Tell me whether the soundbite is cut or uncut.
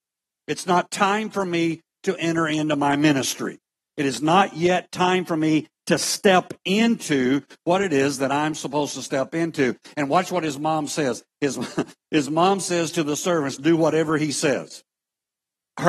uncut